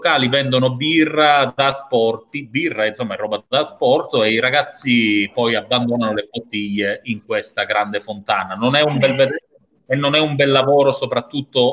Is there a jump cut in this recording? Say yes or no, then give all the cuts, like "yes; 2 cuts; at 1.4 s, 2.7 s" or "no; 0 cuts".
no; 0 cuts